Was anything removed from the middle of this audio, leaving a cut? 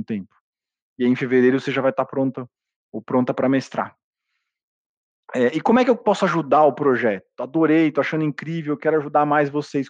yes; 1 cut; at 0.9 s

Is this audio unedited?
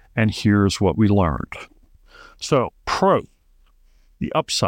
yes; 0 cuts

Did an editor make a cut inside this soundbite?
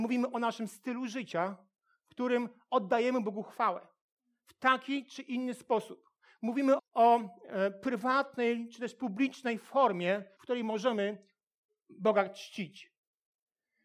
yes; 2 cuts; at 6.8 s, 10.4 s

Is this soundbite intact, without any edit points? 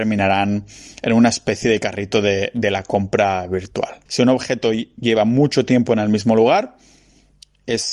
no; 1 cut; at 4.1 s

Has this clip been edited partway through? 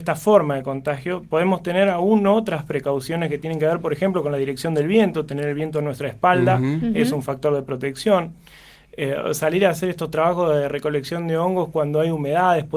no; 0 cuts

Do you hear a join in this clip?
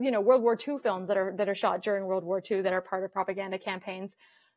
no; 0 cuts

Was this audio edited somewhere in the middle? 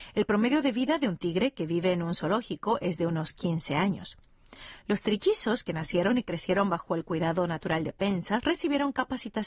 yes; 1 cut; at 8.4 s

